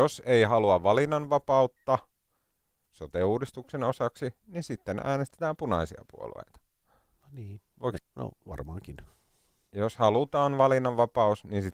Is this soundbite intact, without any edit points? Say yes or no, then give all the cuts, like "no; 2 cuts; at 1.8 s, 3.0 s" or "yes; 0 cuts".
no; 1 cut; at 8.0 s